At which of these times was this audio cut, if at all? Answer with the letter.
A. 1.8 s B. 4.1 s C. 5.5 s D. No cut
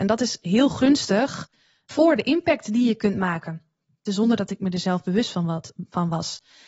B